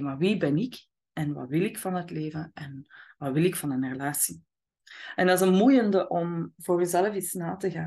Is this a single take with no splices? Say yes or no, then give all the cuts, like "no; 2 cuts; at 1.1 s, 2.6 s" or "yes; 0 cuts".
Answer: yes; 0 cuts